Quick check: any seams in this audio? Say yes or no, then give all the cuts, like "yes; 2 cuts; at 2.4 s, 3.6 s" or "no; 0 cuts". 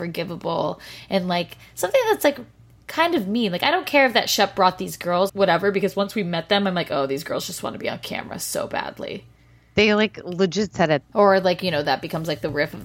yes; 2 cuts; at 5.3 s, 11.0 s